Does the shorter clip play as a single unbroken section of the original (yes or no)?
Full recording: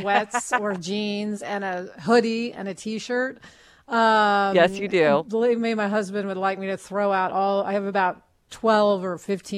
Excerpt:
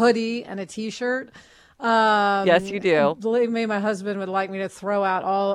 yes